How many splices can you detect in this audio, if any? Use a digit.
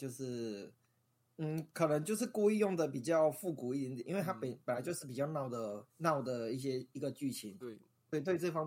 2